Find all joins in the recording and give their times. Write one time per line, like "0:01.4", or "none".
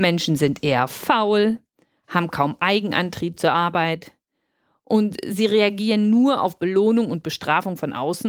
none